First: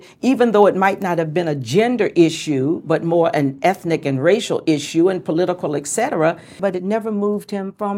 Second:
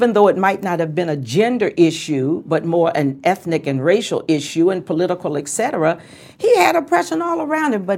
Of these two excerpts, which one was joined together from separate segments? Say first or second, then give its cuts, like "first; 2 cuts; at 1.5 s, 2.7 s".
first; 1 cut; at 6.6 s